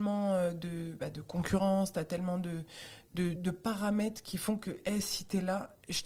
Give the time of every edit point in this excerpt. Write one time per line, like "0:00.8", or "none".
0:03.4

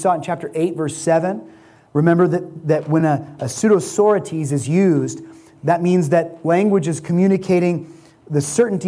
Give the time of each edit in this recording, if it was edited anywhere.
none

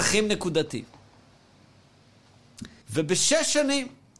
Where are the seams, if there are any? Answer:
0:02.8

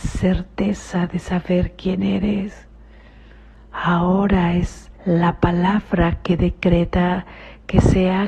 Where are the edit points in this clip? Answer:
0:03.5
0:05.0

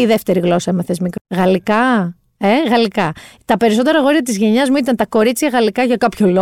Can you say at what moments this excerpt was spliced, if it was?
0:01.2

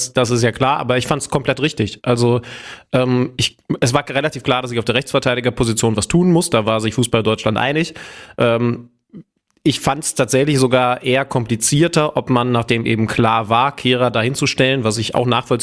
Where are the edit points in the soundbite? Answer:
0:03.4

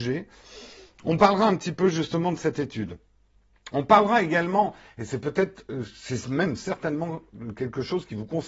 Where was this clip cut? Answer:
none

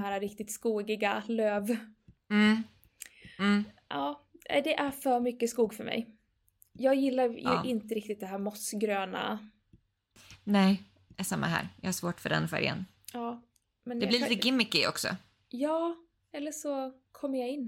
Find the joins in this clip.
none

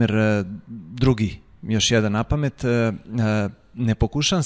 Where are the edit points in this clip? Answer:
none

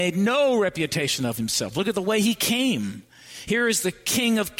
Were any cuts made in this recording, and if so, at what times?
none

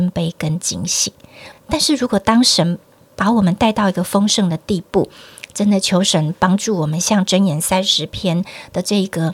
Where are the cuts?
0:01.5

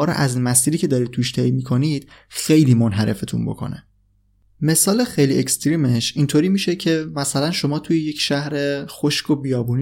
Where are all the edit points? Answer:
none

